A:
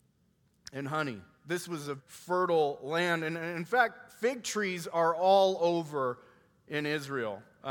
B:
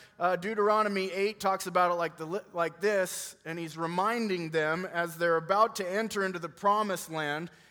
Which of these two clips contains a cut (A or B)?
A